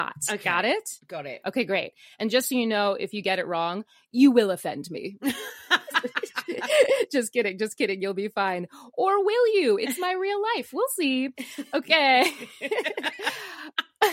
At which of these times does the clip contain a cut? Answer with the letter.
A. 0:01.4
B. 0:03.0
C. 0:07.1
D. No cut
D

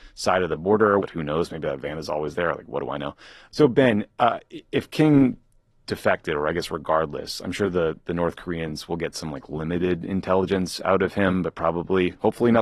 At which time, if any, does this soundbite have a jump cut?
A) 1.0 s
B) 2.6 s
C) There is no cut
A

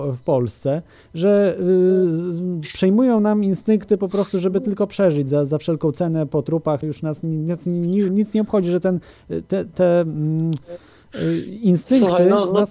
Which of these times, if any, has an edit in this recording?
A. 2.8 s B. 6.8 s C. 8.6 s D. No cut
B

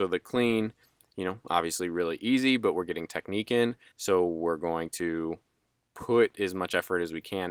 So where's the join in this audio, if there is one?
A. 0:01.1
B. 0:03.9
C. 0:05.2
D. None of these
B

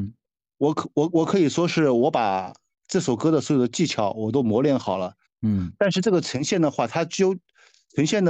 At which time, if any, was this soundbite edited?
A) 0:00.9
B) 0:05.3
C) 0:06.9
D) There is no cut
B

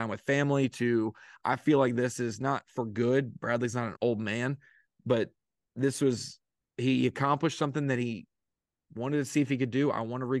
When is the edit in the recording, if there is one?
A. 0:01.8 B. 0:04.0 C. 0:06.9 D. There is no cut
B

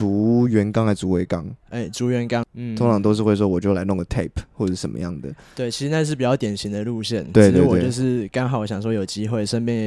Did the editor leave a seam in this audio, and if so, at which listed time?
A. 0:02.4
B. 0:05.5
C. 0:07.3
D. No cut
A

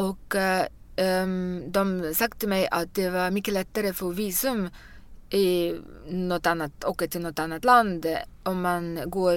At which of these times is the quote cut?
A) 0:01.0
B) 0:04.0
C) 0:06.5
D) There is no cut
D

